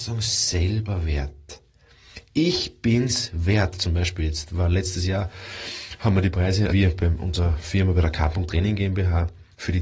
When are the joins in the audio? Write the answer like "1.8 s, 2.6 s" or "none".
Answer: 6.7 s